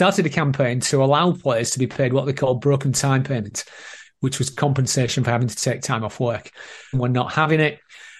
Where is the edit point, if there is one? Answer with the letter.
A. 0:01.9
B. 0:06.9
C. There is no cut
B